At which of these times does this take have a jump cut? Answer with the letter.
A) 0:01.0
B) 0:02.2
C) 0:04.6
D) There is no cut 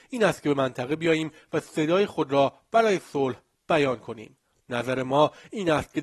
D